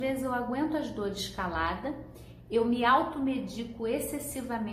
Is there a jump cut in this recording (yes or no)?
no